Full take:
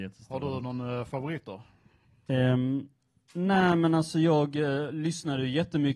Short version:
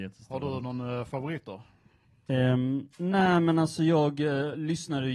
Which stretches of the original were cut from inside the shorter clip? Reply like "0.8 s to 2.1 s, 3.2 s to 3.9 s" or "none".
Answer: 2.9 s to 3.3 s